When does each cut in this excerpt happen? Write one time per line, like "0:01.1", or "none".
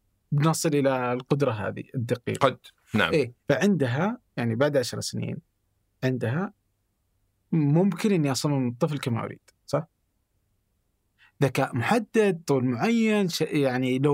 0:03.4